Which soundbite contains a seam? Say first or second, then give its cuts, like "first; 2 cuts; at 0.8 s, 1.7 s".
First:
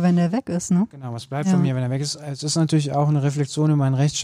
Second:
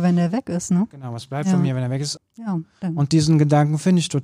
second; 1 cut; at 2.2 s